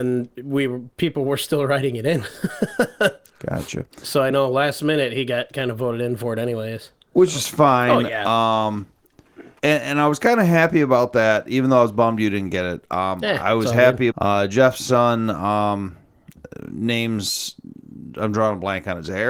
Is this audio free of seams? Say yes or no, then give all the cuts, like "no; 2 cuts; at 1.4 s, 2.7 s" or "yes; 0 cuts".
no; 2 cuts; at 9.6 s, 14.1 s